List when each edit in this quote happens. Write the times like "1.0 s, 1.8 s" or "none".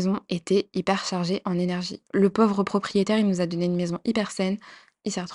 2.1 s